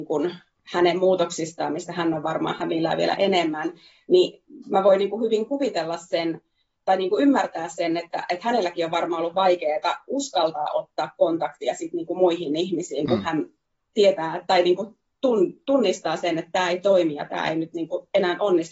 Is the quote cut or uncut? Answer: uncut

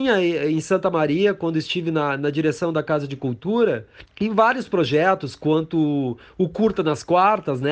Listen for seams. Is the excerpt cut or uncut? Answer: uncut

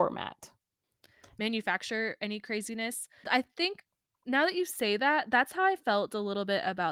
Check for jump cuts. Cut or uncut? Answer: cut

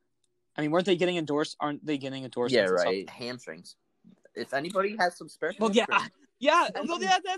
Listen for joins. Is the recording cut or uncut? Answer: cut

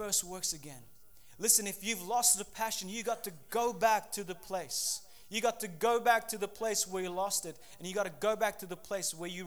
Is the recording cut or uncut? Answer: uncut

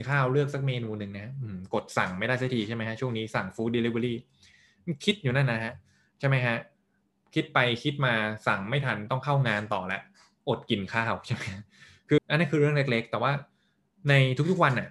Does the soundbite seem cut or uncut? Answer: cut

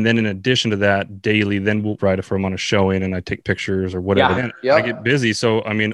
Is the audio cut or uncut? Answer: cut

